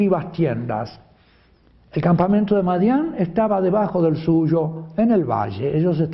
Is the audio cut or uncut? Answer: uncut